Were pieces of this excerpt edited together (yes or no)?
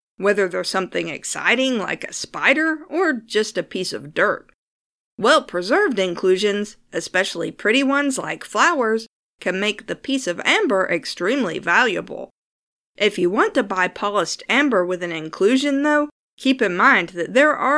no